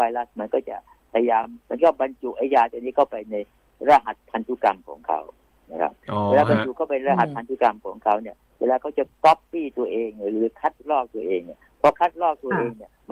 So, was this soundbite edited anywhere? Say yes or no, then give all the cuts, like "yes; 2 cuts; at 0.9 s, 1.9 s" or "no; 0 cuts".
no; 0 cuts